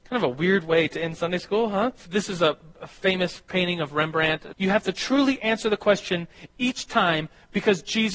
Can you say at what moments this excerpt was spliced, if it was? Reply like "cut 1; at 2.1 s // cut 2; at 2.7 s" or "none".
cut 1; at 2.1 s // cut 2; at 4.5 s